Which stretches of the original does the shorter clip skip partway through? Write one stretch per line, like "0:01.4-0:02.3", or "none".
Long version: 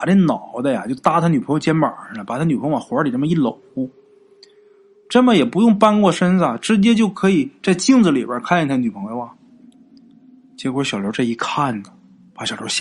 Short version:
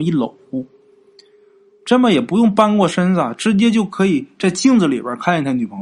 none